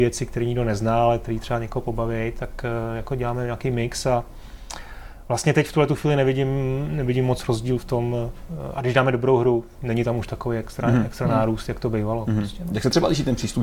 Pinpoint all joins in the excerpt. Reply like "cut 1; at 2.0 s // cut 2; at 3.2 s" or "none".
none

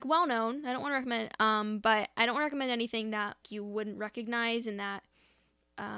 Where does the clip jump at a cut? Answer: cut 1; at 1.4 s // cut 2; at 3.4 s

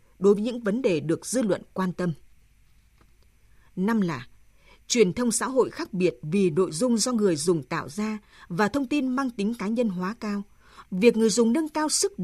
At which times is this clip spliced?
cut 1; at 10.8 s

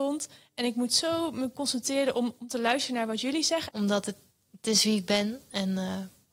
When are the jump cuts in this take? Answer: cut 1; at 2.4 s // cut 2; at 3.7 s

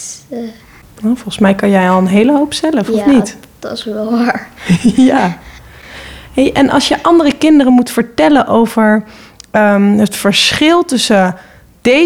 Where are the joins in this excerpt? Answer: none

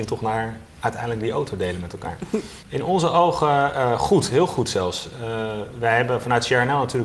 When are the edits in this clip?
cut 1; at 2.6 s

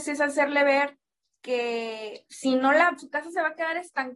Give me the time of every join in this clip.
cut 1; at 3.0 s

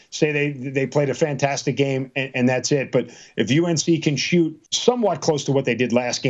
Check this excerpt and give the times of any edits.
cut 1; at 4.7 s

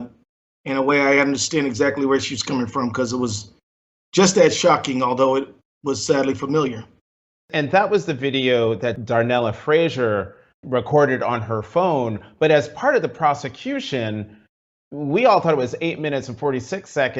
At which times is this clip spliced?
cut 1; at 10.6 s

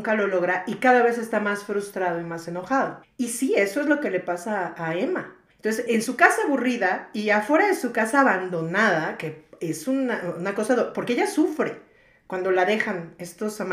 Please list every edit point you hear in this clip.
cut 1; at 5.9 s

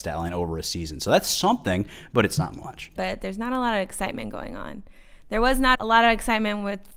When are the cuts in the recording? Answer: cut 1; at 3.0 s // cut 2; at 5.8 s

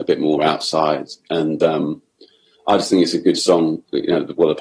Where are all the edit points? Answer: none

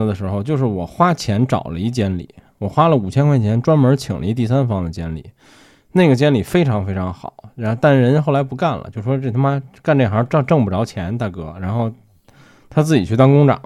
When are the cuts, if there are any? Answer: none

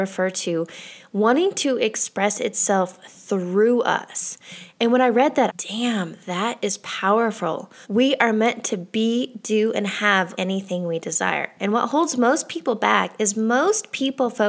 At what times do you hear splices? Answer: cut 1; at 5.5 s // cut 2; at 7.8 s // cut 3; at 10.4 s

